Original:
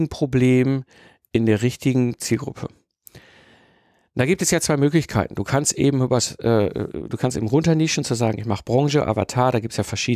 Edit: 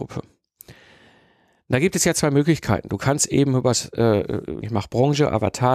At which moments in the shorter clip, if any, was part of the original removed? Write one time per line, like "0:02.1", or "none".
0:04.6

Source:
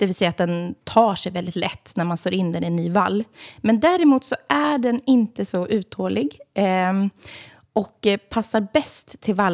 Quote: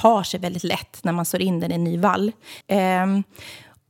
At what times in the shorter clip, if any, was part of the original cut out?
0:02.6

